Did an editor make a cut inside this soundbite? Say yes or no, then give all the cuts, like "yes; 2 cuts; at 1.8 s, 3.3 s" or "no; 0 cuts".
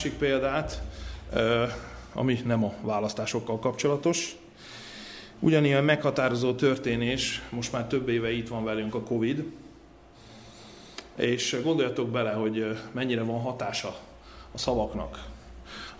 no; 0 cuts